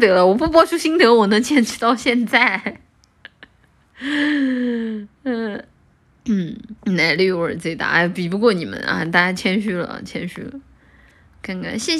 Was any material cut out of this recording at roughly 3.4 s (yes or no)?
no